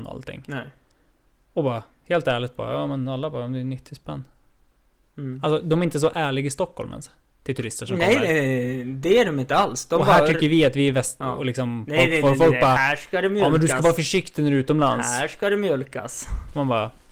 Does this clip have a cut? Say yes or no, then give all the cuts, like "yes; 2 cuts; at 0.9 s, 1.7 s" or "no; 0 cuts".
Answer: yes; 1 cut; at 11.2 s